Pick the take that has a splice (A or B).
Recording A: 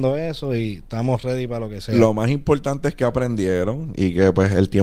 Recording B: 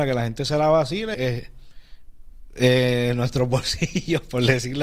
B